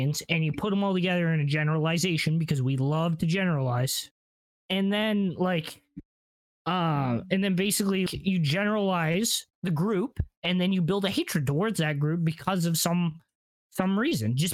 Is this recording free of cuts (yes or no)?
no